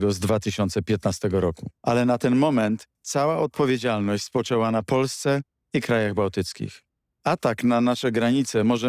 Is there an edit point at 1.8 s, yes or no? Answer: yes